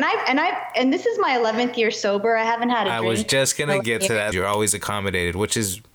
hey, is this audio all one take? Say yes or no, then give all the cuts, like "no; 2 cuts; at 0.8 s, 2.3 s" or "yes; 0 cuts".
no; 1 cut; at 4.3 s